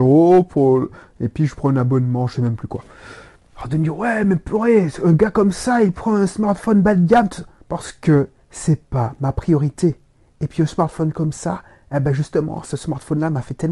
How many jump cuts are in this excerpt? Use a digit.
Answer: 0